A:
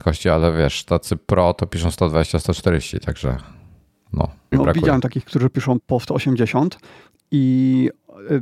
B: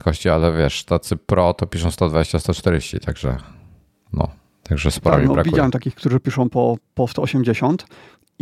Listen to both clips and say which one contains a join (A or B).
A